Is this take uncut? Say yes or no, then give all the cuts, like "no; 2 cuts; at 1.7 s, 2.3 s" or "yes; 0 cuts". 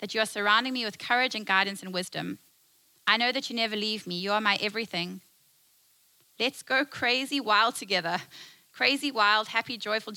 yes; 0 cuts